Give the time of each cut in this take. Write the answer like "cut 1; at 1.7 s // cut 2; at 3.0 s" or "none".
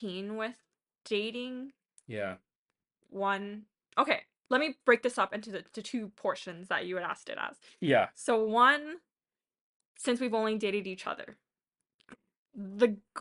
none